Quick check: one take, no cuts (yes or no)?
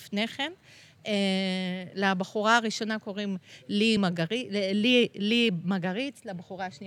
yes